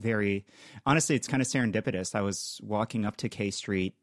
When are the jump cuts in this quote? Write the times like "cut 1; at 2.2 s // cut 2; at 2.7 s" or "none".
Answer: none